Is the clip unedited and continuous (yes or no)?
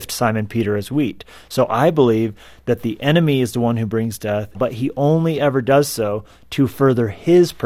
no